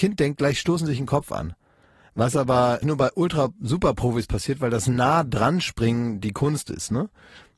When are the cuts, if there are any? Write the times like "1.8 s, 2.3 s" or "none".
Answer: 2.8 s